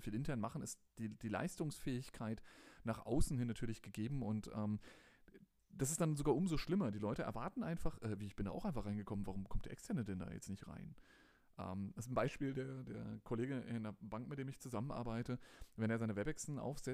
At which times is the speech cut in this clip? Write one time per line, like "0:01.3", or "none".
none